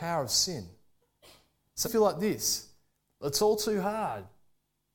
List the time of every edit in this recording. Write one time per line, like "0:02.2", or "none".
0:01.8